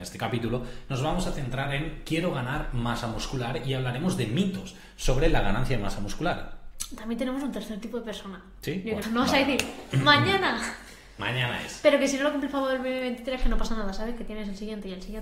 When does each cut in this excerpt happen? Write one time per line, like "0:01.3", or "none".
0:09.0